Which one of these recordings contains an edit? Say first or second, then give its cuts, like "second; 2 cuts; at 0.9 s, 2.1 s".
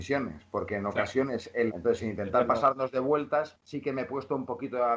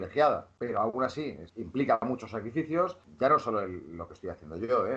first; 1 cut; at 1.7 s